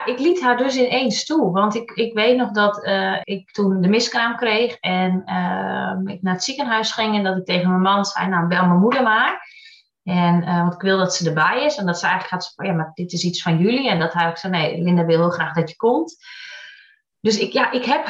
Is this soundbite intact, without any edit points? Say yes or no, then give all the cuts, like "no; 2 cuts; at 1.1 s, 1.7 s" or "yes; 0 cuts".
no; 1 cut; at 3.2 s